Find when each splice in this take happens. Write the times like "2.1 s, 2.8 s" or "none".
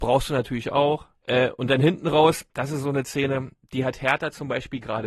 1.2 s, 2.5 s